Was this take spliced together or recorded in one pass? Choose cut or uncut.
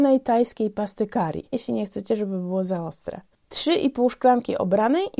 cut